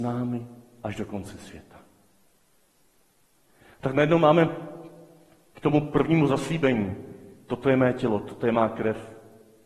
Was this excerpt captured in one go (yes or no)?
yes